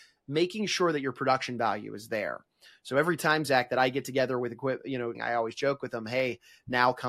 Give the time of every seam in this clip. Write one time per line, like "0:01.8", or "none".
0:05.1

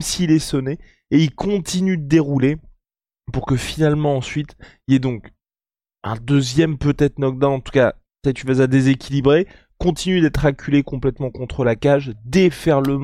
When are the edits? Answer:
none

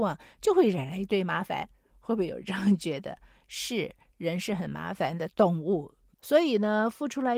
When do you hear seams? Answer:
0:06.1

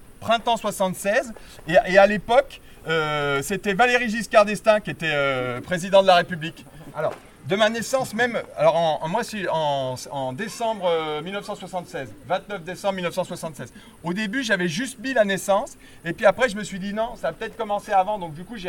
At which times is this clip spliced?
0:06.9

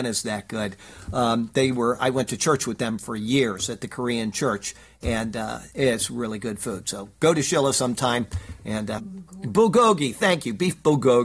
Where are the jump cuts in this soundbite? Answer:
0:09.0

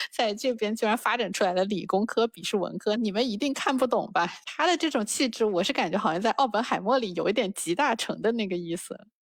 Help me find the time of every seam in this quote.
0:03.0
0:04.4

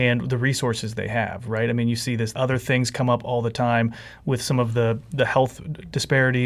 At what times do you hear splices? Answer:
0:02.3

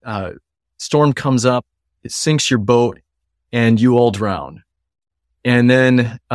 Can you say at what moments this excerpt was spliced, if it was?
none

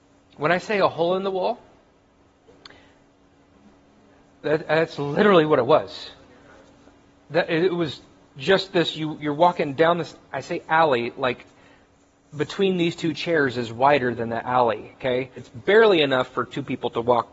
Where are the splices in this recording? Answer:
0:15.4

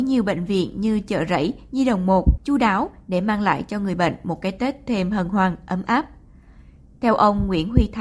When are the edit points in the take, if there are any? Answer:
0:02.4

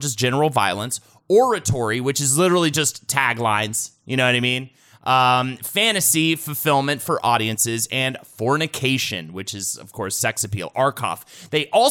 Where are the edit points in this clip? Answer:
none

